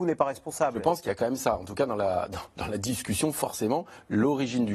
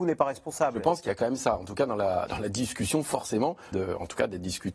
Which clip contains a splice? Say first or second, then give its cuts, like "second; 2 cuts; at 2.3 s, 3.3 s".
second; 2 cuts; at 2.3 s, 3.7 s